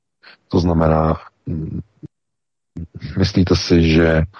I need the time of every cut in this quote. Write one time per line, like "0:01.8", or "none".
none